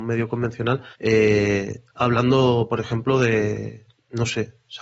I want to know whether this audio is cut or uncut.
cut